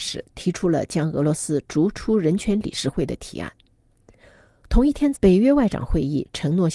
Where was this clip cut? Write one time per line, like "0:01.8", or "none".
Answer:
0:05.1